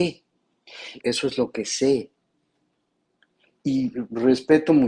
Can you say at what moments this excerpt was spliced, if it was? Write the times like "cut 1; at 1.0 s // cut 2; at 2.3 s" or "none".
cut 1; at 1.0 s

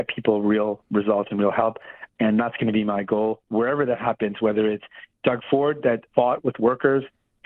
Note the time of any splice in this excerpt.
cut 1; at 2.1 s // cut 2; at 6.1 s

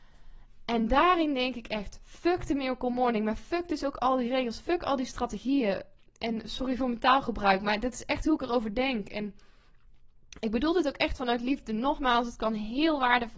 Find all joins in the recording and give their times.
none

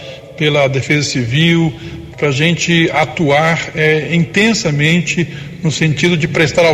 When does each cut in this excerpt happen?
cut 1; at 2.1 s

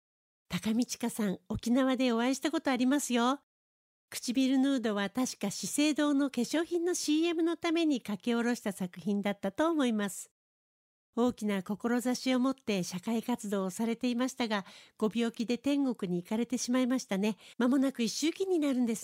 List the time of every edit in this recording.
cut 1; at 17.5 s

